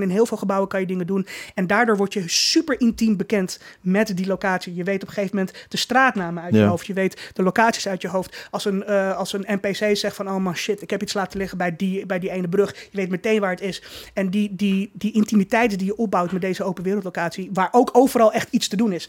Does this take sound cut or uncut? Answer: uncut